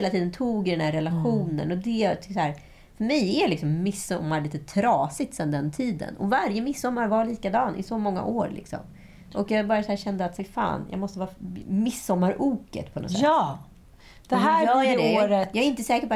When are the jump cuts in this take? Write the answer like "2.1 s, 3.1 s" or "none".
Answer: 10.4 s, 11.6 s